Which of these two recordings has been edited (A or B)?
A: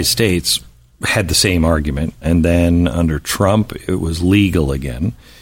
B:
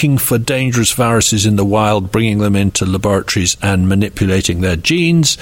A